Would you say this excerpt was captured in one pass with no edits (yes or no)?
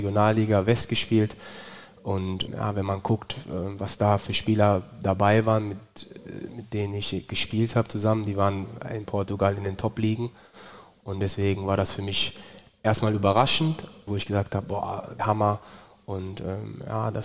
no